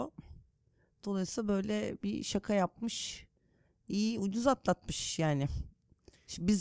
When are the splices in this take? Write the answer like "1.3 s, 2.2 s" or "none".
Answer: none